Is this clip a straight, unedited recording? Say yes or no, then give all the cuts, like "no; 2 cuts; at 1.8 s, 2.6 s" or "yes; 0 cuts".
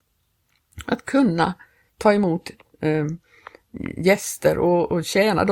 yes; 0 cuts